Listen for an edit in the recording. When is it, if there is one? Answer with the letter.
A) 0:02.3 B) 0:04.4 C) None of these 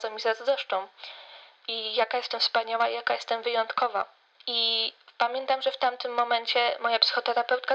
C